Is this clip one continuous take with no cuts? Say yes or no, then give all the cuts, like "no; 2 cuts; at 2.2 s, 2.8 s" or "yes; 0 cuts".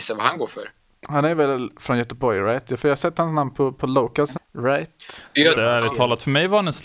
no; 2 cuts; at 4.4 s, 5.6 s